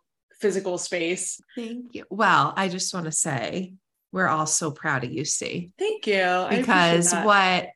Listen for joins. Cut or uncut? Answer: cut